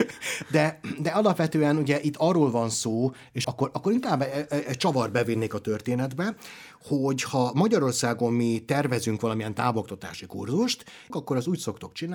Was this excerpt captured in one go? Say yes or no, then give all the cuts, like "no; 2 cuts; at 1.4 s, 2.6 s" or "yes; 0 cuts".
no; 2 cuts; at 3.4 s, 11.1 s